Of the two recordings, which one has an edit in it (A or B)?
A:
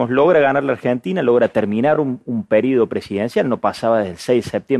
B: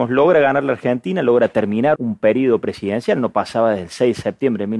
B